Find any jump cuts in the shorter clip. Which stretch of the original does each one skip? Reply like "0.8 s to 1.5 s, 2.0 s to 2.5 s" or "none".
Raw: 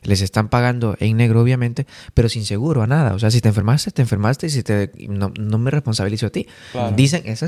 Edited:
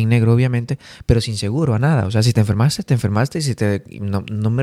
none